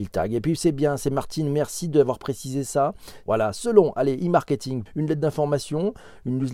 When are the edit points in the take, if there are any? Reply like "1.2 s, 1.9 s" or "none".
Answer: 3.2 s, 4.9 s